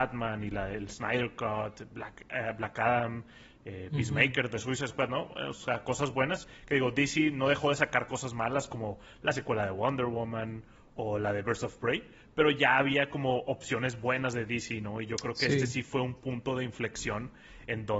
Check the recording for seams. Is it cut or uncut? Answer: uncut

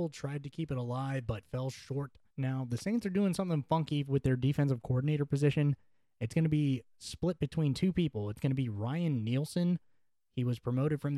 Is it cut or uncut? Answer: cut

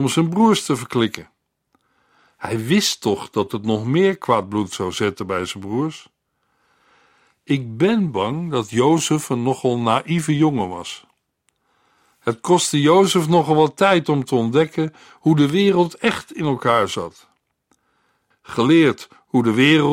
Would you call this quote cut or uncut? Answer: cut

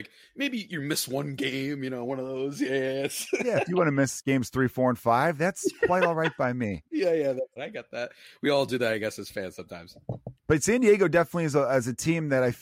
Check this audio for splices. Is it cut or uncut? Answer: cut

